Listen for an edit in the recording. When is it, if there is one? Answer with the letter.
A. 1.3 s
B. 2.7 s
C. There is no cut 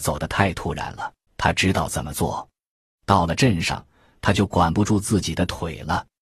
A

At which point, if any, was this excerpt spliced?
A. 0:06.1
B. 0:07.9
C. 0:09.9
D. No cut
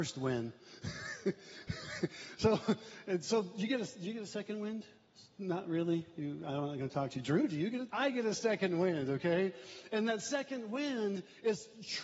B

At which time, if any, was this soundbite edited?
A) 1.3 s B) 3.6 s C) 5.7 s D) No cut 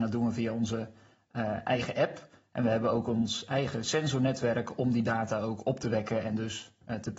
D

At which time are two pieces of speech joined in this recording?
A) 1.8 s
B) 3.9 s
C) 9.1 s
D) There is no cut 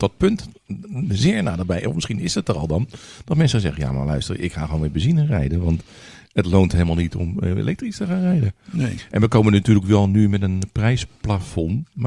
D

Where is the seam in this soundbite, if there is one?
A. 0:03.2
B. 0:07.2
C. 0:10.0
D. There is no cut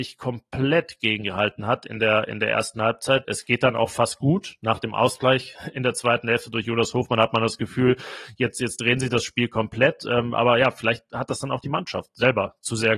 A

